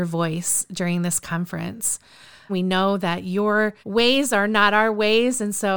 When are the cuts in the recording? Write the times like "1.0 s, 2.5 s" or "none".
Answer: 2.5 s, 3.8 s